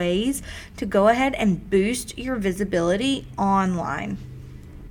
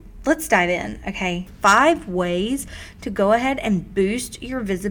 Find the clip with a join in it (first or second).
second